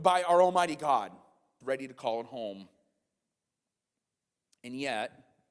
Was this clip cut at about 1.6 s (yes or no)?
yes